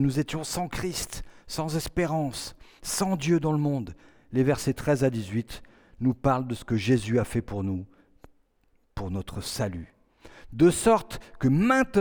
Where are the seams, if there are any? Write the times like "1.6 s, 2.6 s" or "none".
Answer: none